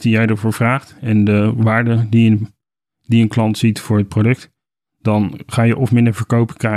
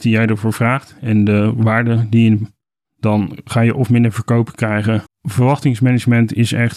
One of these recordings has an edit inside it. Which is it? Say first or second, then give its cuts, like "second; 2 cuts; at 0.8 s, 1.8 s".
second; 2 cuts; at 2.8 s, 5.1 s